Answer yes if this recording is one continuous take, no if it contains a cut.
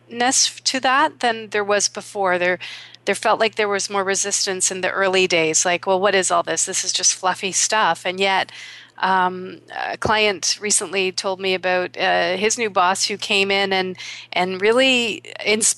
yes